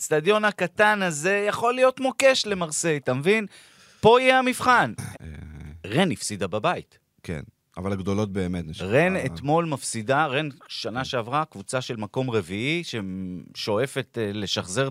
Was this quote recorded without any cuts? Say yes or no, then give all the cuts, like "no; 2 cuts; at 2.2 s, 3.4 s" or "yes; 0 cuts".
no; 1 cut; at 5.1 s